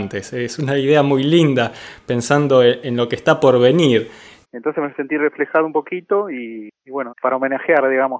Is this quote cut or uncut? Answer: cut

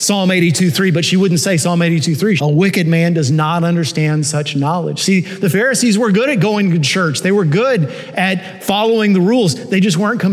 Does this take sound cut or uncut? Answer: cut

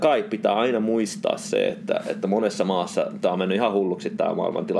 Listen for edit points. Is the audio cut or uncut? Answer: uncut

